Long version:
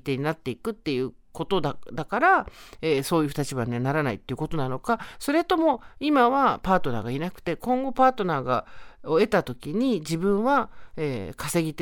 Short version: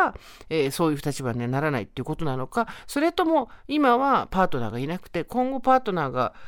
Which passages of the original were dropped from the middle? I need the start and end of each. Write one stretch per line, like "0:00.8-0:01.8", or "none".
none